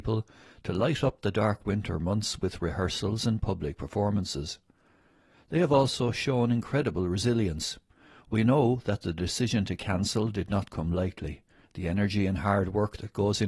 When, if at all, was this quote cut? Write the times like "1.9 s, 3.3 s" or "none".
11.6 s